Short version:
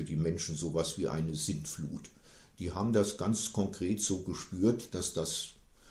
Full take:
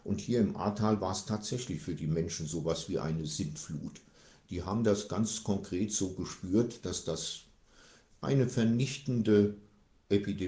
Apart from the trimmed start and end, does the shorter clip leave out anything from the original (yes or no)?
no